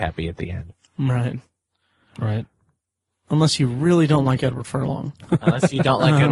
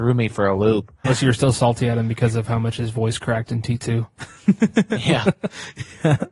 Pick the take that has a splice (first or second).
second